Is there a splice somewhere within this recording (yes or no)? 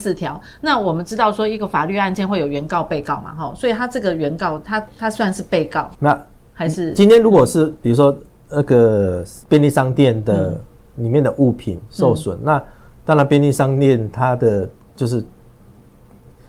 yes